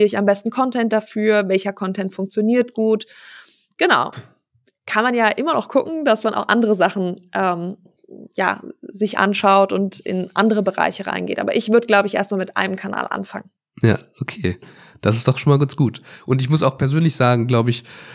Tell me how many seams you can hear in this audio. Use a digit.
1